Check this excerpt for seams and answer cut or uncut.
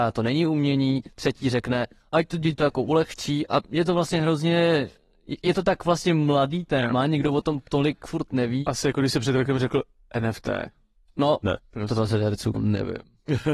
cut